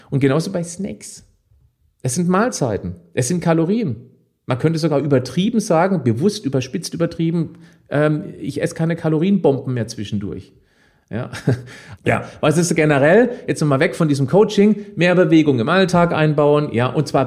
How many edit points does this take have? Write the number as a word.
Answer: one